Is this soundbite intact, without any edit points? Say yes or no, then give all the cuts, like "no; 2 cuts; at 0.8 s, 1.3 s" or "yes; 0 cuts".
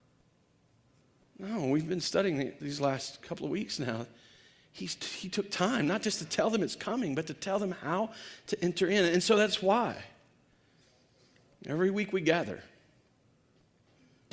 yes; 0 cuts